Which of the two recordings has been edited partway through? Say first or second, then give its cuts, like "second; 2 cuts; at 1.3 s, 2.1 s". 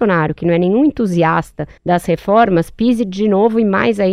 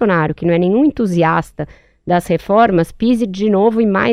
first; 1 cut; at 1.8 s